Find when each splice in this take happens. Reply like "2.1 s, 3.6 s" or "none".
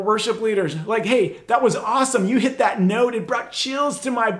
none